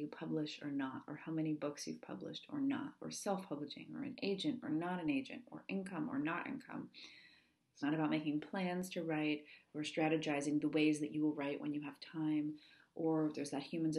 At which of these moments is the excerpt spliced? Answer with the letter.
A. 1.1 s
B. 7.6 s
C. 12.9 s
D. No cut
B